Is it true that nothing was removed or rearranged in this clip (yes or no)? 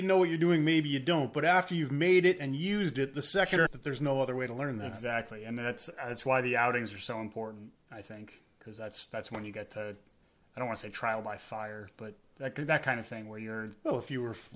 no